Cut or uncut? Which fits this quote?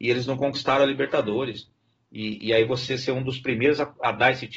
uncut